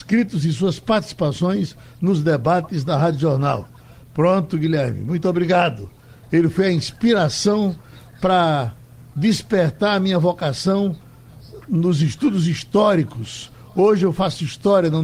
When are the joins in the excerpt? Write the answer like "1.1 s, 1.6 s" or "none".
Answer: 6.2 s